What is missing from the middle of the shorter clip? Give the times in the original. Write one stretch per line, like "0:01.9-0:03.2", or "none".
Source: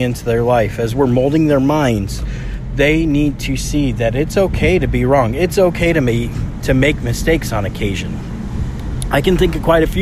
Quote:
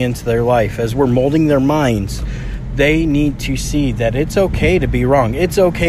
none